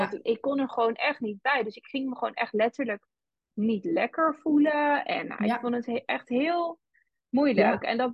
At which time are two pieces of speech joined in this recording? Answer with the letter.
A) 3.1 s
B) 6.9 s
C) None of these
C